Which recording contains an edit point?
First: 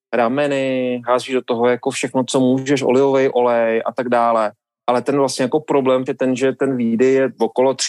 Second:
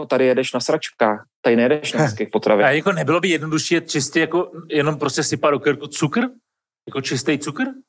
first; 1 cut; at 6.1 s

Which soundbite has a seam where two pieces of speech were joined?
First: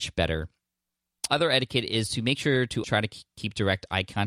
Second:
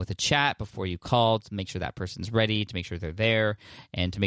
first; 2 cuts; at 1.3 s, 2.8 s

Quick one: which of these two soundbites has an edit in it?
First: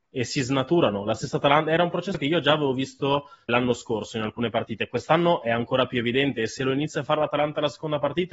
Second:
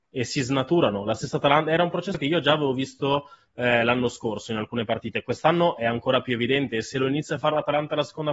first; 1 cut; at 3.5 s

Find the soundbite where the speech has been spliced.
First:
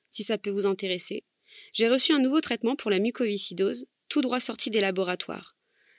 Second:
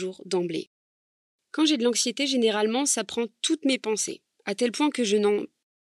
second; 1 cut; at 1.3 s

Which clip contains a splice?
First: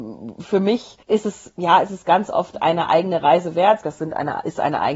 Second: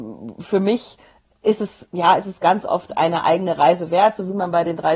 first; 2 cuts; at 1.0 s, 3.8 s

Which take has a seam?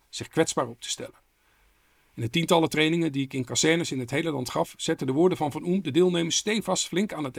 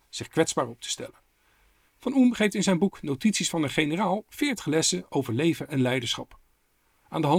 second; 1 cut; at 1.9 s

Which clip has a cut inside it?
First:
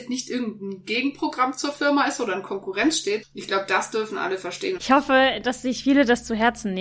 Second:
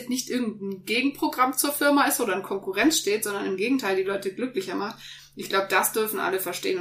first; 2 cuts; at 3.2 s, 4.8 s

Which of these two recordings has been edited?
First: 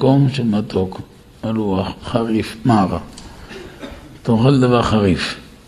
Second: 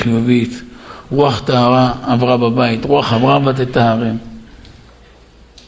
first; 1 cut; at 2.0 s

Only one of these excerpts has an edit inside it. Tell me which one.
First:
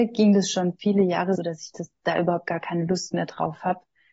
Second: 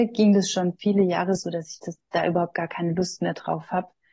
first; 1 cut; at 1.4 s

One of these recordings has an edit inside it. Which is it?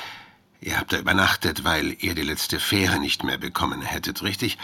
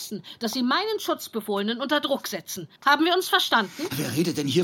second; 1 cut; at 2.8 s

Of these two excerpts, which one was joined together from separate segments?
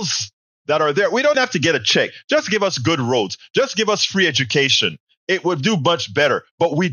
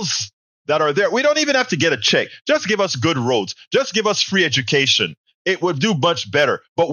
first; 1 cut; at 1.3 s

